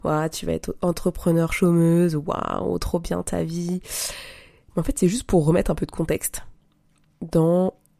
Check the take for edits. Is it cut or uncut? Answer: uncut